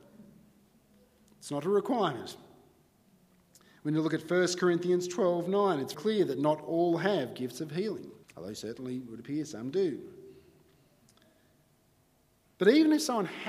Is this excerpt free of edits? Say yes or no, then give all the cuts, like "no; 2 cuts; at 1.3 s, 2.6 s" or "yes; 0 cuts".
no; 2 cuts; at 5.9 s, 8.2 s